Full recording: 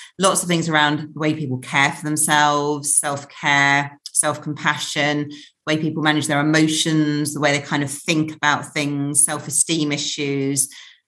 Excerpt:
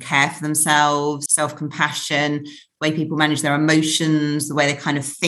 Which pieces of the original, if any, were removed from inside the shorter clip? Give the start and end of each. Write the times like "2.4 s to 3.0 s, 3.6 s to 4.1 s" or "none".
2.9 s to 4.1 s